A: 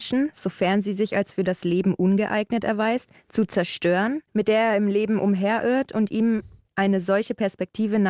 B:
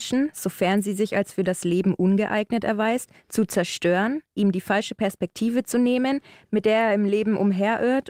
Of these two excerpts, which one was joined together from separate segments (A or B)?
A